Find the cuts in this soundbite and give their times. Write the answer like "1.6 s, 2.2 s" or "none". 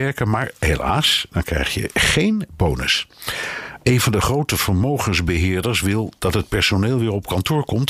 3.8 s